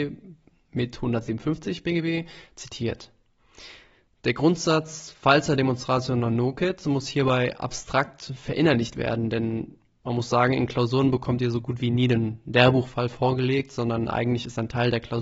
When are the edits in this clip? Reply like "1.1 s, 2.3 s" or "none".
none